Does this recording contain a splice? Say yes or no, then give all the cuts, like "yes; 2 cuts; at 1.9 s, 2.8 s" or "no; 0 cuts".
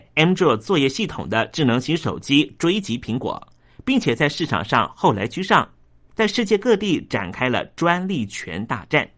yes; 1 cut; at 6.1 s